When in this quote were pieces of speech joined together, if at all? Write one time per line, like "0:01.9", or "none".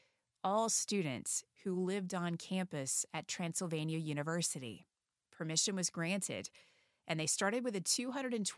none